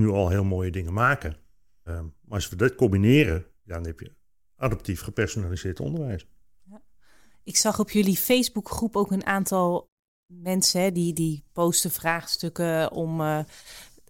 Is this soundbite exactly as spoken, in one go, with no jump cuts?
yes; 0 cuts

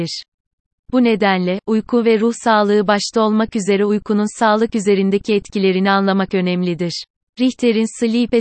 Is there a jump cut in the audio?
yes; 1 cut; at 7.3 s

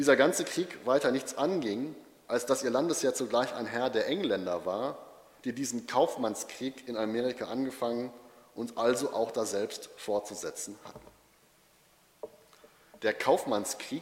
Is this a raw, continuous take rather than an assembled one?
yes; 0 cuts

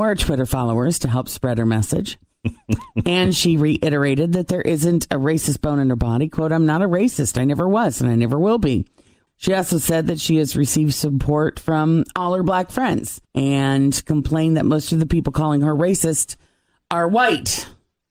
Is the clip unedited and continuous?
no; 2 cuts; at 9.3 s, 13.2 s

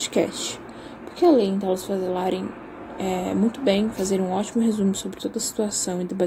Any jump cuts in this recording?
no; 0 cuts

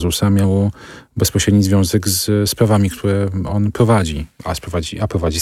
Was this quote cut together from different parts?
no; 0 cuts

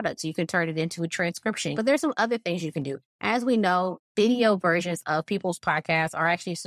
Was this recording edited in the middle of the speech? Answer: yes; 1 cut; at 1.7 s

